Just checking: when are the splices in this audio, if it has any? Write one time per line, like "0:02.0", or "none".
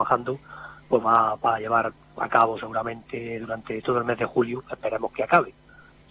0:01.0
0:05.1